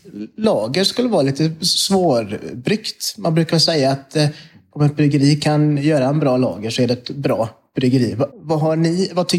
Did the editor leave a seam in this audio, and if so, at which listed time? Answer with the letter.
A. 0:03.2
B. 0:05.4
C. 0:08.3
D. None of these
C